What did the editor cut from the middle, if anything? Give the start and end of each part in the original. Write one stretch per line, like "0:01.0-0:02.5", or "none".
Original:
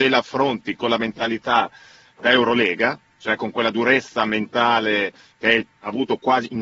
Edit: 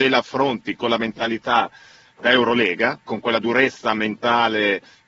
0:03.1-0:03.4